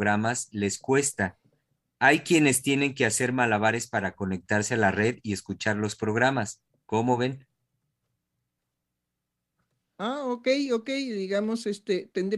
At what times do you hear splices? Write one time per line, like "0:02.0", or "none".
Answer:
none